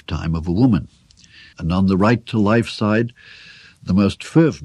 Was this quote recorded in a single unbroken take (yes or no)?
no